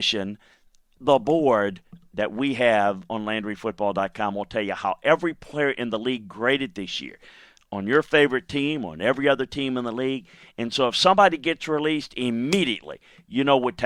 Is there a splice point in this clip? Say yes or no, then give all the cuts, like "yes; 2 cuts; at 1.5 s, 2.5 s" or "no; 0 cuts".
no; 0 cuts